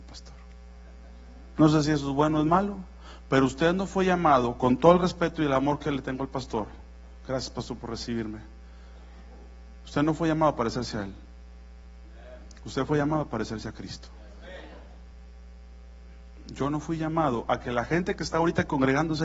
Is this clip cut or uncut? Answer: uncut